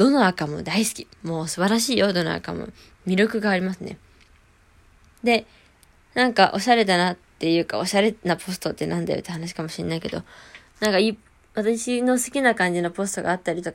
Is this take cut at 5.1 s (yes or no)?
yes